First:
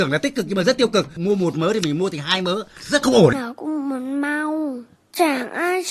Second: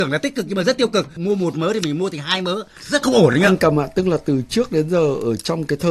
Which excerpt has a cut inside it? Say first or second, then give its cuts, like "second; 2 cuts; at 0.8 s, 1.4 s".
first; 1 cut; at 3.3 s